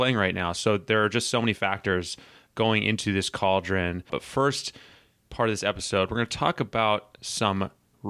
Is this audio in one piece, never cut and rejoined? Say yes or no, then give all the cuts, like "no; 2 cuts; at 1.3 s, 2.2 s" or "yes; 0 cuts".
no; 1 cut; at 4.1 s